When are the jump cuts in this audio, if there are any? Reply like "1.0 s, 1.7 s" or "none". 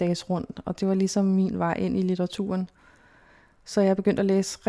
none